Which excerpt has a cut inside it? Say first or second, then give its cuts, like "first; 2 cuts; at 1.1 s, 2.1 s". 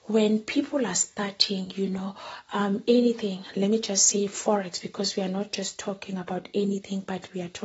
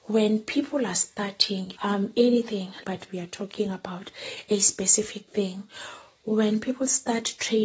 second; 2 cuts; at 1.7 s, 2.8 s